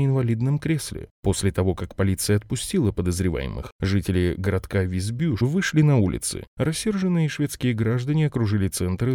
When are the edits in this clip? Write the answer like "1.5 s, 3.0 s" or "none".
5.4 s